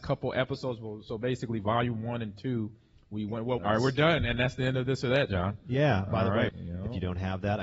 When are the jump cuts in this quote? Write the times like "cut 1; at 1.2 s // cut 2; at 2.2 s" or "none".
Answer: cut 1; at 3.6 s // cut 2; at 6.5 s